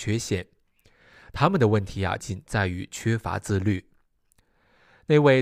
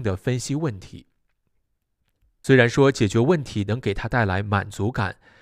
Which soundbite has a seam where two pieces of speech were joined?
first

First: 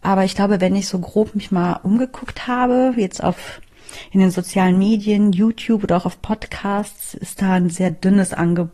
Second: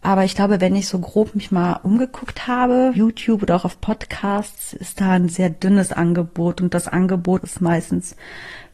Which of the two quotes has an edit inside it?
second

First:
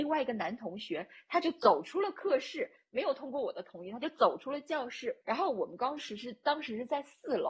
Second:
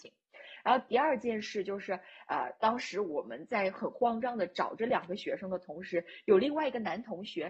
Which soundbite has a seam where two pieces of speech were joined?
first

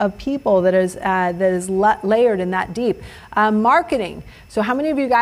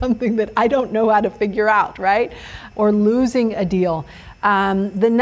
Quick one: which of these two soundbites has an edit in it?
second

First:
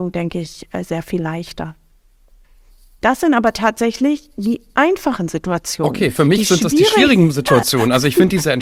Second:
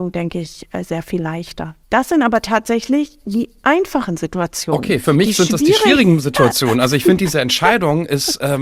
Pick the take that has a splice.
second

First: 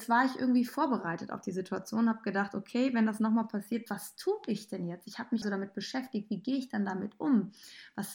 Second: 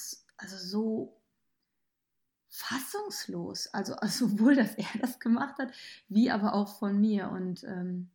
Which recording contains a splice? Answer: first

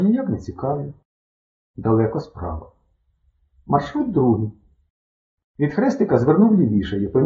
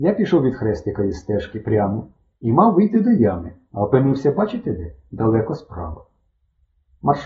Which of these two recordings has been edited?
first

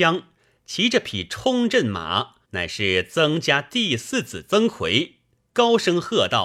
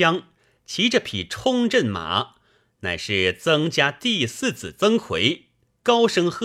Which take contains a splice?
first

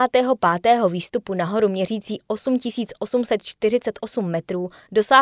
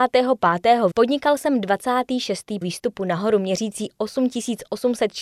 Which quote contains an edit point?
second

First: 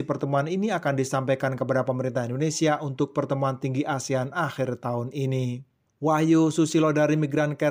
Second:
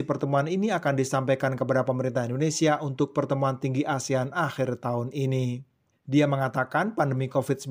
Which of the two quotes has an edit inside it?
second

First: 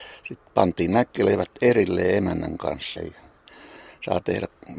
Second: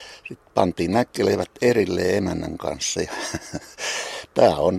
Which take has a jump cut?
first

